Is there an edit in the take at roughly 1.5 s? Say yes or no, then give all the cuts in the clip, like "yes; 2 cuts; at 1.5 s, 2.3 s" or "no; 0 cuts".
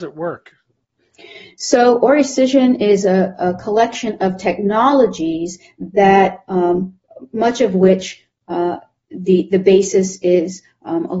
no; 0 cuts